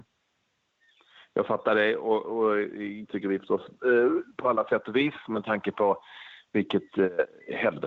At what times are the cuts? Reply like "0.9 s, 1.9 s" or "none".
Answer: 3.1 s

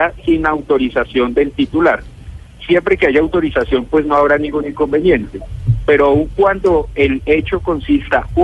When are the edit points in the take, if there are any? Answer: none

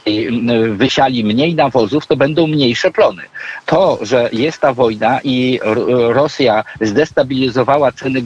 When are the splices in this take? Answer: 3.6 s

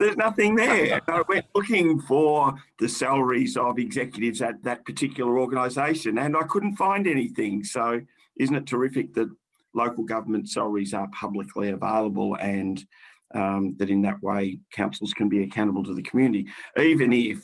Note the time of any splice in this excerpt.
4.6 s

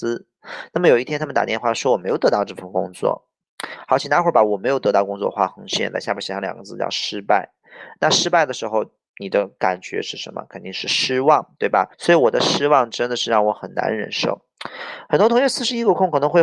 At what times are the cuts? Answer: 11.9 s

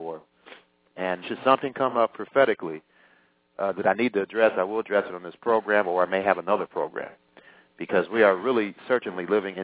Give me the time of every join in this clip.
1.2 s

